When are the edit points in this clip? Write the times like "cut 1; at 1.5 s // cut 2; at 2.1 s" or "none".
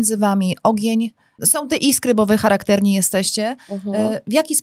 cut 1; at 1.4 s